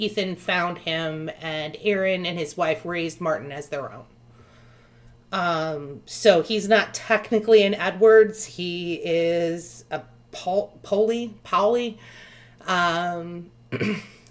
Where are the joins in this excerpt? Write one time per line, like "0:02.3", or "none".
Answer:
none